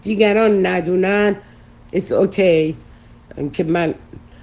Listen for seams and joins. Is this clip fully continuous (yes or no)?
yes